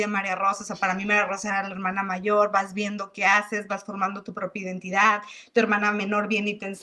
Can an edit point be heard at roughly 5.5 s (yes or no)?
no